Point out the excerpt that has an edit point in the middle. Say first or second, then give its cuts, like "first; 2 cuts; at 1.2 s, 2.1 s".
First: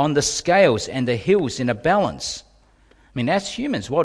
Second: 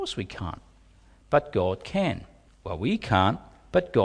second; 1 cut; at 2.5 s